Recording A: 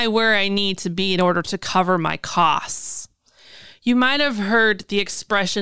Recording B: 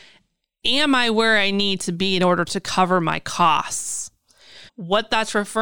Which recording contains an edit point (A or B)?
B